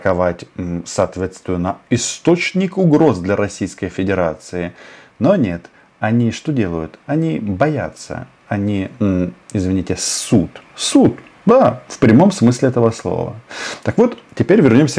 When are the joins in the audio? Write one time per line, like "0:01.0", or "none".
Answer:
0:10.7